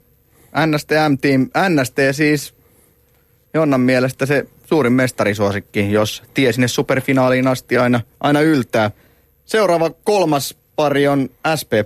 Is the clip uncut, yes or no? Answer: yes